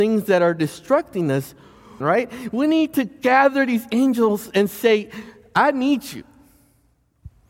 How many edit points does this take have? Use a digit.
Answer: 1